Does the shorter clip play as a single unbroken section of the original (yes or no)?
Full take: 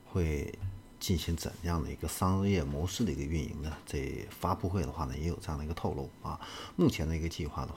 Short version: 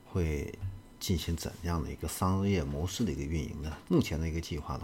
no